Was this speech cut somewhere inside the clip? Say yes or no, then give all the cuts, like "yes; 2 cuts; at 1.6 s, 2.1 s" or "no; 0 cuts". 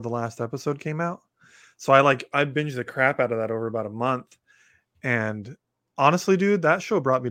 no; 0 cuts